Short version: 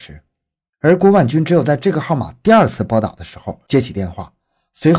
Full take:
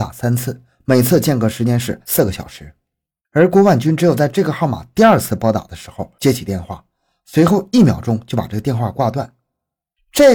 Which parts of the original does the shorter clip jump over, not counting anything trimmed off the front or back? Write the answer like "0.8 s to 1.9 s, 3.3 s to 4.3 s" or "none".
none

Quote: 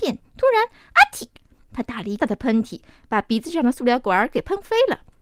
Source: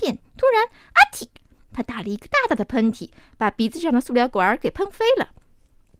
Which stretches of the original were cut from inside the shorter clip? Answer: 2.2 s to 2.5 s

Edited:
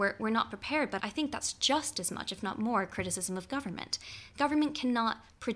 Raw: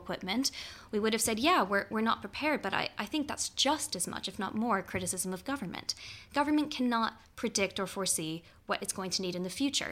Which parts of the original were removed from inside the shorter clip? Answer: 2.7 s to 2.9 s

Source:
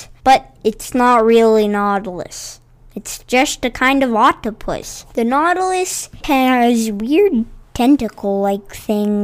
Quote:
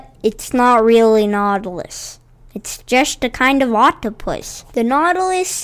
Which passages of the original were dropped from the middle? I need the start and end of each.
none

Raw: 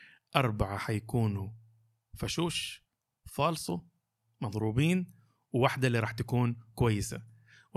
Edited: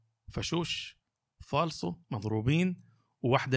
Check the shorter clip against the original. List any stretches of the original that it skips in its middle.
3.9 s to 4.3 s

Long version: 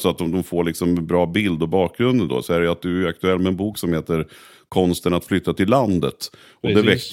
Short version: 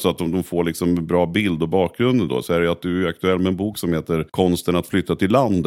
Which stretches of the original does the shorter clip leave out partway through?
4.3 s to 4.7 s

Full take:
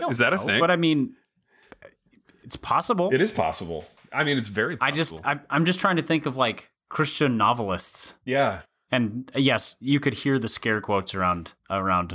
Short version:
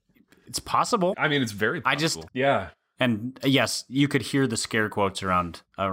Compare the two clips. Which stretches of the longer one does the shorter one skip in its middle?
3.1 s to 4.1 s, 5.2 s to 8.2 s

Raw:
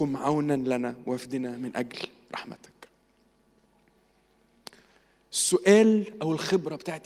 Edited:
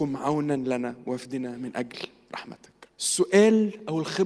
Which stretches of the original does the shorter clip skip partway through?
2.9 s to 5.3 s

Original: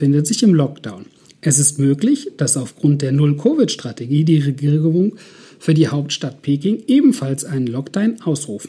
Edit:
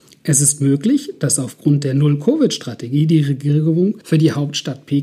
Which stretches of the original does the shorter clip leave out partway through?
5.2 s to 5.6 s

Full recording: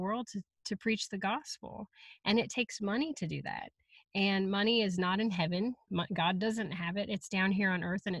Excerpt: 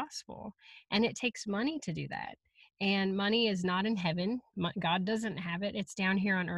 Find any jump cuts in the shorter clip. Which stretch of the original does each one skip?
none

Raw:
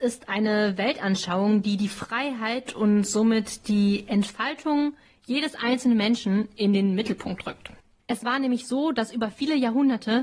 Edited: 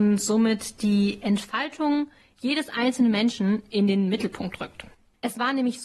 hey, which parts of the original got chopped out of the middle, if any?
none

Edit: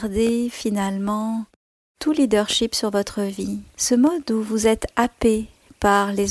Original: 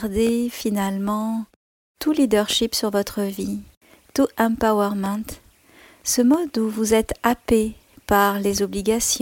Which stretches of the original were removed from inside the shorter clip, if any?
3.7 s to 6.0 s

